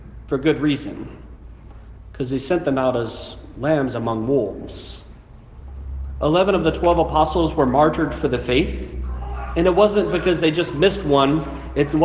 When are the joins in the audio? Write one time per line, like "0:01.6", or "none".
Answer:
none